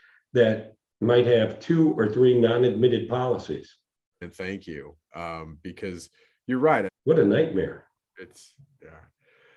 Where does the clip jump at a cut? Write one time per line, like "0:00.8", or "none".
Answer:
0:04.2
0:06.9